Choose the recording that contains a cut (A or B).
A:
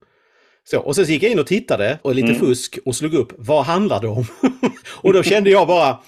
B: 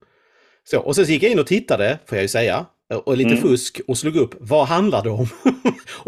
A